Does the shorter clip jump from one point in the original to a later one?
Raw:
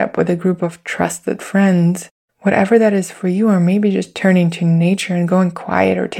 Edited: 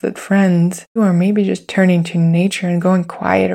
yes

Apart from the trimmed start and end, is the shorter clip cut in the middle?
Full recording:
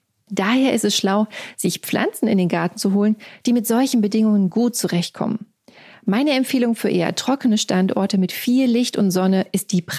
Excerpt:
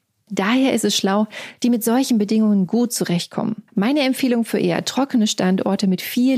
yes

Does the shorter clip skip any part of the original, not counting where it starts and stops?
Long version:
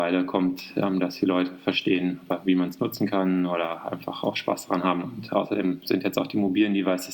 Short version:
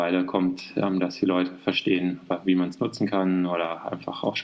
no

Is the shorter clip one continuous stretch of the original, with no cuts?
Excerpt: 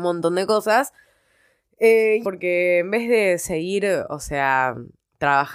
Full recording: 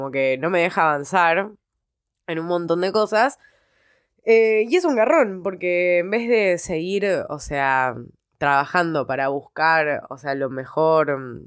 no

